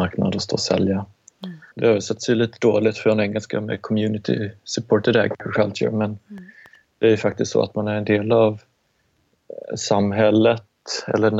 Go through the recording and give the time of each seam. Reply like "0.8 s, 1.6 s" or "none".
1.7 s